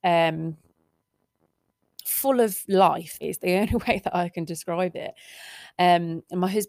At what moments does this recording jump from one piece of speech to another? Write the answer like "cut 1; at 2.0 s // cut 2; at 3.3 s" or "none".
cut 1; at 3.2 s